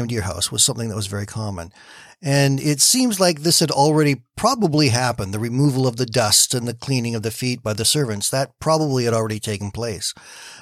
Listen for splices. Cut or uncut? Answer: uncut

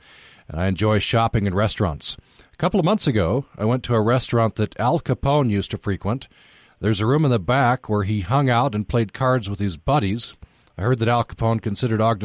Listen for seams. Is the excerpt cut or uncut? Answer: uncut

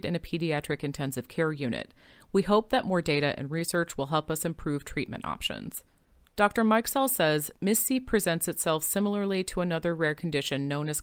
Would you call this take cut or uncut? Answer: cut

